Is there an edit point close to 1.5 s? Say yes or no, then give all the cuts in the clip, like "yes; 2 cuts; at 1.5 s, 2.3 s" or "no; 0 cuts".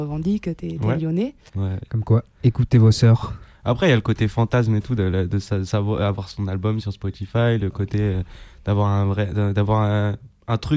yes; 1 cut; at 1.5 s